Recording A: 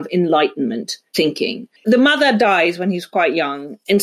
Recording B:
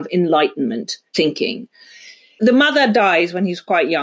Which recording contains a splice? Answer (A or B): A